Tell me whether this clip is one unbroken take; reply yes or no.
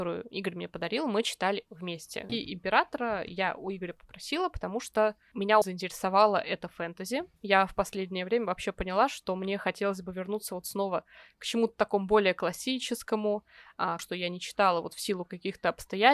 no